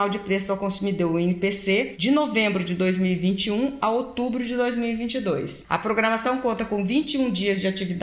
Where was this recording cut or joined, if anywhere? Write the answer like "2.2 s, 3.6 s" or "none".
5.6 s